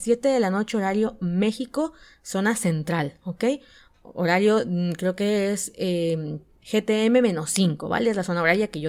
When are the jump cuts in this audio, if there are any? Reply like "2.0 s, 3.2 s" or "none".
none